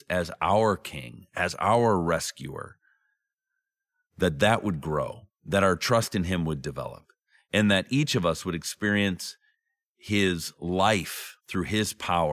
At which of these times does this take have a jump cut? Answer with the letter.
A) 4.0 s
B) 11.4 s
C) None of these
B